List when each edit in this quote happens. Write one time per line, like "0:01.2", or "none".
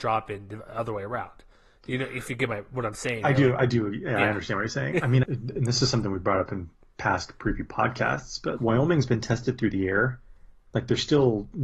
0:05.2
0:08.6